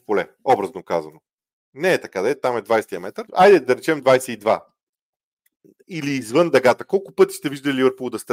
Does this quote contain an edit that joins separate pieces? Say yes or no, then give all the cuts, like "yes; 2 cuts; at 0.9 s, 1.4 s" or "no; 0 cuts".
yes; 1 cut; at 3.3 s